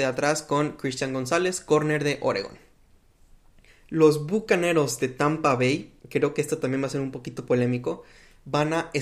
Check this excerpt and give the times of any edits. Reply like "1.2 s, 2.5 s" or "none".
3.7 s, 6.0 s